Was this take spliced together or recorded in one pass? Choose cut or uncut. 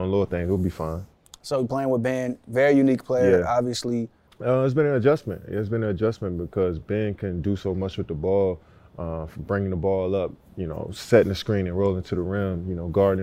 cut